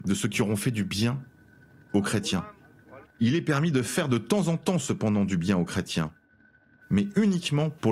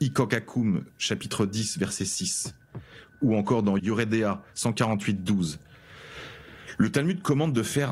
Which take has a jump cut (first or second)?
first